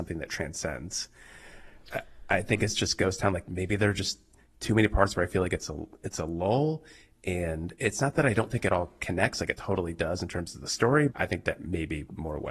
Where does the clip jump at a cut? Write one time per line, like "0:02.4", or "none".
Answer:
0:11.1